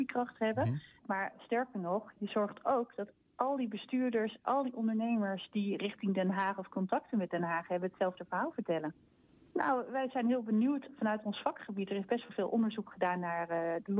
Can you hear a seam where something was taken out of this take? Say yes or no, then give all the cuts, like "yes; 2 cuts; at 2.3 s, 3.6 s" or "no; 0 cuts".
yes; 2 cuts; at 1.0 s, 9.5 s